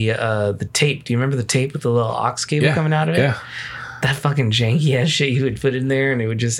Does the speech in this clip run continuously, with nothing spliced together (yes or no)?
yes